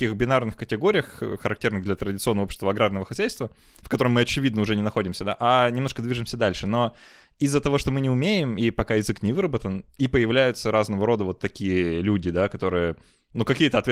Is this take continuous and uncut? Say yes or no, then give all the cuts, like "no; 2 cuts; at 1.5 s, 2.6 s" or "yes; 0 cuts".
yes; 0 cuts